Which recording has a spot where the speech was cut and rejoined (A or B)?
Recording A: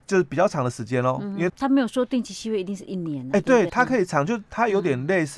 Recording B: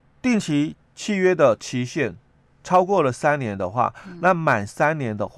A